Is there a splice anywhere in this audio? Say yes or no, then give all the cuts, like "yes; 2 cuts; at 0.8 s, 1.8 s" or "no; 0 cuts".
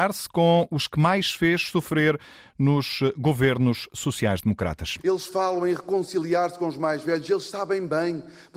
no; 0 cuts